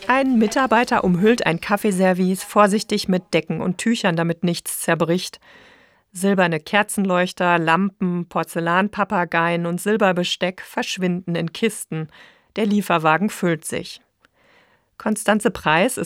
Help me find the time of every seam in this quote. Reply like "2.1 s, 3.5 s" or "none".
none